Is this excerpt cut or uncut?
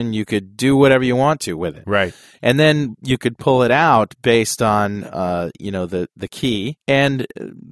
cut